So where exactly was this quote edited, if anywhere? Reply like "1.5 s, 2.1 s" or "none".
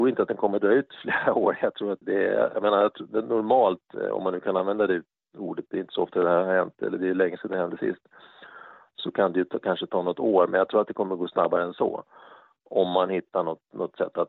2.0 s

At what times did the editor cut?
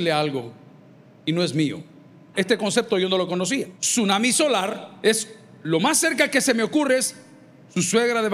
2.3 s, 3.7 s

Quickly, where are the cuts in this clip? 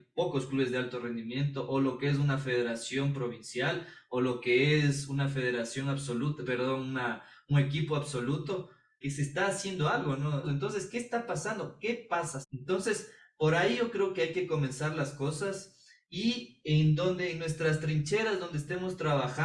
9.0 s, 10.4 s, 12.4 s

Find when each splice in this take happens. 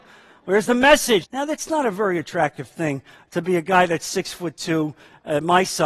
1.2 s

